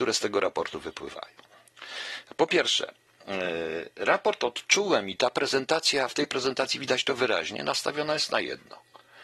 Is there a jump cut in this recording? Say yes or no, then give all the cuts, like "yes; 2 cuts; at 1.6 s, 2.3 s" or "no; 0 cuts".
no; 0 cuts